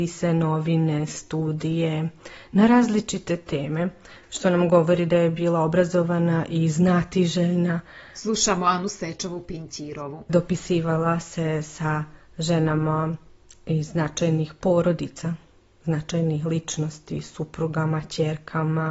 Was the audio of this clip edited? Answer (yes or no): no